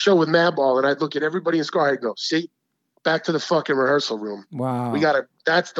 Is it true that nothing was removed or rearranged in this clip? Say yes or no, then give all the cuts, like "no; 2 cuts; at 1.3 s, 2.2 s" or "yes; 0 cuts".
yes; 0 cuts